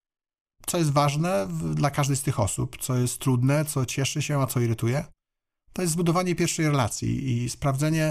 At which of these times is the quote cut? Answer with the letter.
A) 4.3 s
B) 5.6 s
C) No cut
C